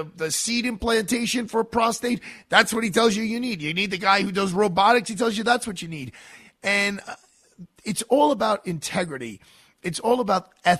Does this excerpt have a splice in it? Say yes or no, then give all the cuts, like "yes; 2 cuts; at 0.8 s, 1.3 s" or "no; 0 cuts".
no; 0 cuts